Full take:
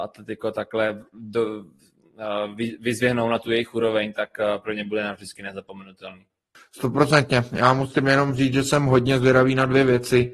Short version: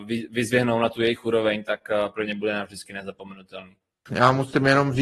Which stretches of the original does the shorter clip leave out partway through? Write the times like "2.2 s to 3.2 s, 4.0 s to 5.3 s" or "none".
6.6 s to 7.5 s